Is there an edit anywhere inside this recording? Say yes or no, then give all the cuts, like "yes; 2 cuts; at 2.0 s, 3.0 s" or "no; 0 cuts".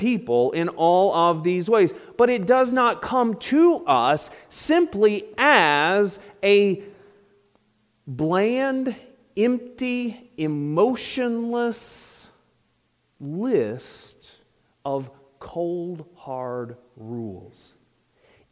no; 0 cuts